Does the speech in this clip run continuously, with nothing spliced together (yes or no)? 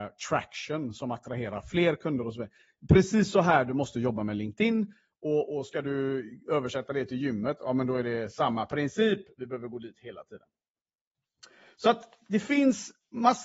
yes